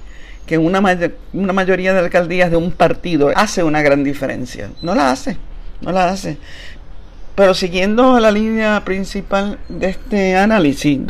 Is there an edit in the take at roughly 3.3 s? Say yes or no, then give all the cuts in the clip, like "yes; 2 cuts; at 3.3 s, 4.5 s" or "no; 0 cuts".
yes; 1 cut; at 3.3 s